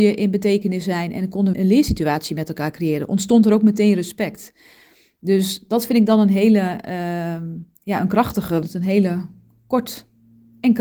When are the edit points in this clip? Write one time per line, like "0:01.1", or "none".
0:01.5
0:08.6